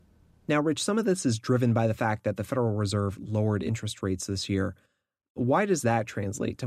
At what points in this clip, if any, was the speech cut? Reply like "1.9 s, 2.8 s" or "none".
none

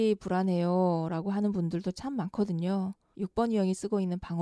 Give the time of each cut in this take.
3.1 s

